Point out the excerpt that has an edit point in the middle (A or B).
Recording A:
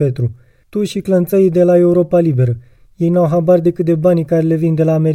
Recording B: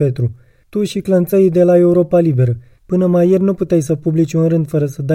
B